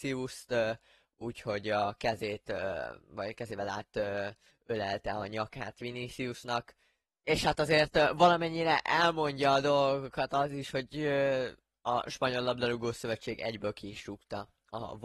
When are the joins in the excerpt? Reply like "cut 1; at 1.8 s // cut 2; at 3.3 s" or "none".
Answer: cut 1; at 7.1 s